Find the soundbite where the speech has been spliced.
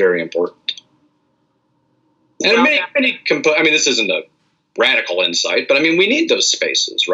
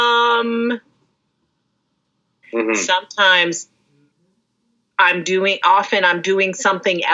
second; 1 cut; at 2.4 s

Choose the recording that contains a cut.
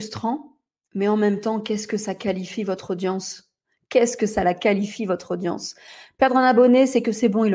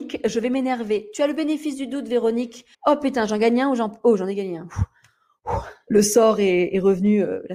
second; 2 cuts; at 2.7 s, 5.9 s

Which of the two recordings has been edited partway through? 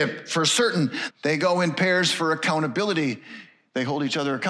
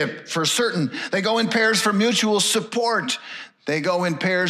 first; 1 cut; at 1.1 s

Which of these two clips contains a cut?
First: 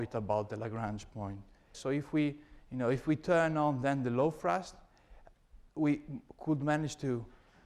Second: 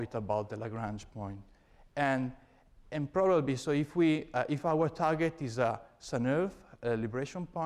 first; 1 cut; at 1.7 s

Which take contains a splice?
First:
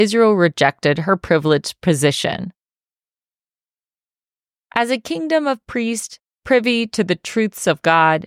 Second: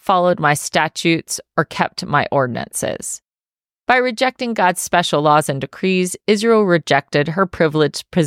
second; 1 cut; at 3.7 s

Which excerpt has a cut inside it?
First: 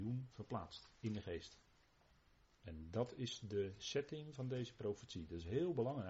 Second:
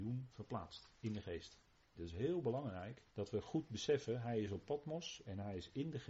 second; 2 cuts; at 2.0 s, 3.1 s

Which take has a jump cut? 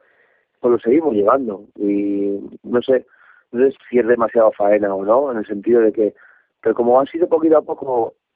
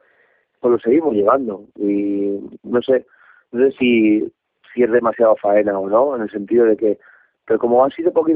first; 1 cut; at 3.7 s

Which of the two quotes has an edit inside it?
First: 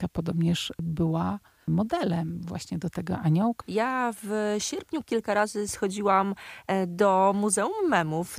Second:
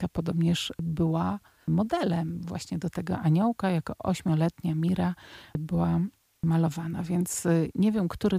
first; 2 cuts; at 3.6 s, 5.0 s

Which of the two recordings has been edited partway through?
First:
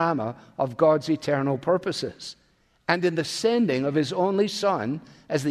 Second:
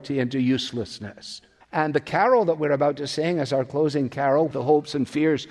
second; 2 cuts; at 1.6 s, 4.5 s

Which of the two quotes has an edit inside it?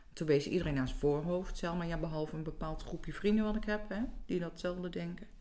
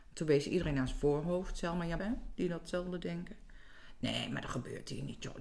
second; 1 cut; at 2.0 s

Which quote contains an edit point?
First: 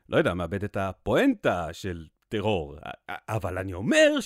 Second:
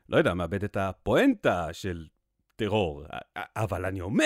first; 1 cut; at 2.2 s

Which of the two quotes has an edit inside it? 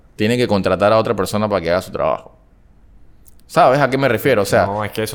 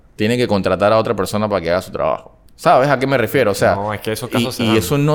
second; 1 cut; at 2.5 s

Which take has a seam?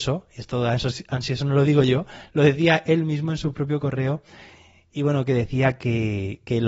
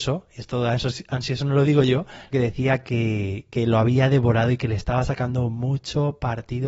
second; 1 cut; at 2.3 s

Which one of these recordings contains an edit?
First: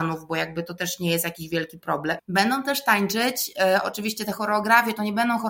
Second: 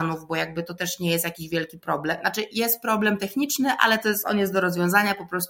first; 1 cut; at 2.2 s

